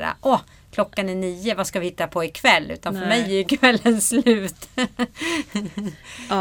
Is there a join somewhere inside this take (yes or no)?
no